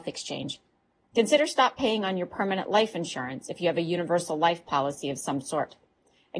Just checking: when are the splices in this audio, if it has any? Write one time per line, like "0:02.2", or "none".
0:01.0